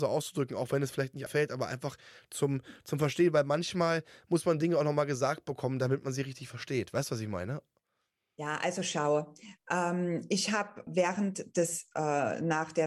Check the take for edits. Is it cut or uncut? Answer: cut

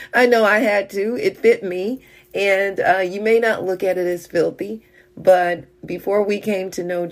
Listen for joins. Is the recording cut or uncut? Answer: uncut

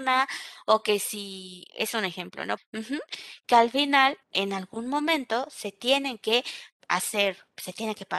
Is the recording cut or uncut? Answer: cut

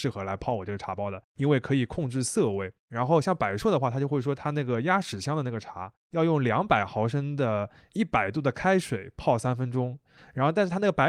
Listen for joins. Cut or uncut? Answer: uncut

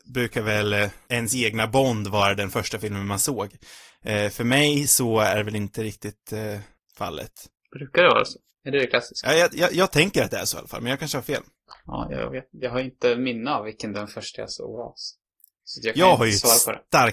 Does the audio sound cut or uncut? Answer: uncut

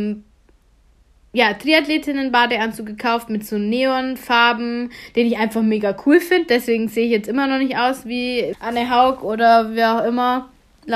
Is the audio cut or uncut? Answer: cut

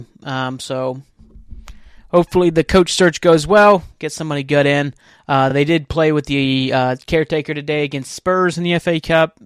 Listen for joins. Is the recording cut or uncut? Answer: uncut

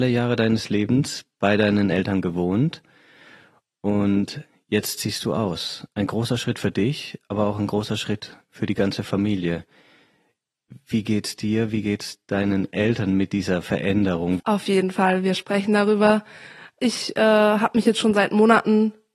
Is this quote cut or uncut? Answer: cut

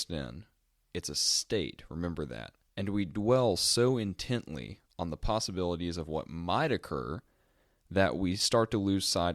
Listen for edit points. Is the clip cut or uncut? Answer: cut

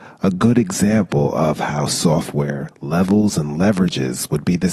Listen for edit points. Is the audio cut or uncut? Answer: cut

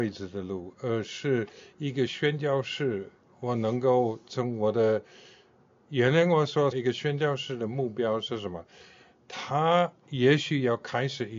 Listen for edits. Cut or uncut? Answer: cut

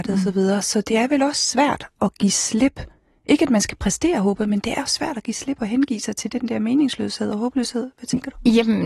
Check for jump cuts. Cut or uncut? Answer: uncut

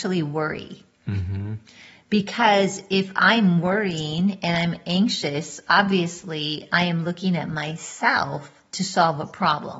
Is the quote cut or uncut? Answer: uncut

